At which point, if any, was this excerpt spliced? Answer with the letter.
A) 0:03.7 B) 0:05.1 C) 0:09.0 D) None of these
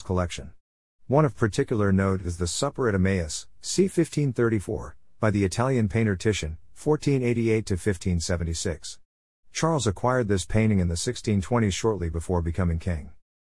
D